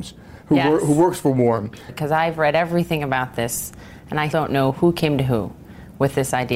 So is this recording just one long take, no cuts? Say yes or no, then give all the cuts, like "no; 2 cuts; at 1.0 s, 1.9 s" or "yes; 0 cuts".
no; 2 cuts; at 1.9 s, 4.3 s